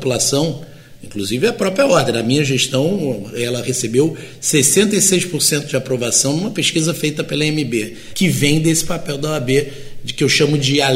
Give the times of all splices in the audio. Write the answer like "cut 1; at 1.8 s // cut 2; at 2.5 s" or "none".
none